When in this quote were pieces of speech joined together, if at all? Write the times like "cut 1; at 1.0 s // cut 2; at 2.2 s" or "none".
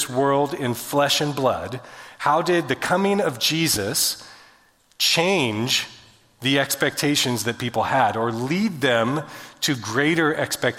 none